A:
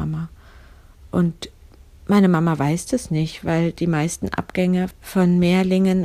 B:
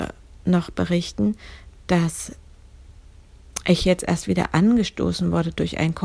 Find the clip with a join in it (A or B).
A